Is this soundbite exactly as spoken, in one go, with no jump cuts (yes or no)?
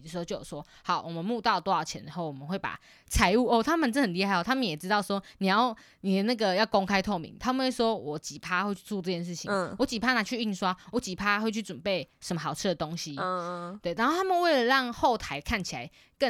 yes